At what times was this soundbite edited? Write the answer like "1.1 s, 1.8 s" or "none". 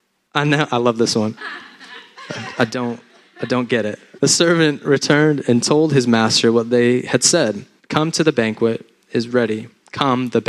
1.4 s, 4.2 s, 7.8 s